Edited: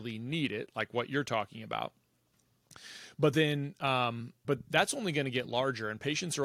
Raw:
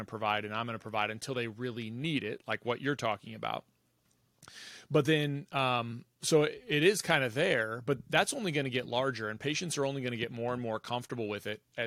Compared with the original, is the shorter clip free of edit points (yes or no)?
no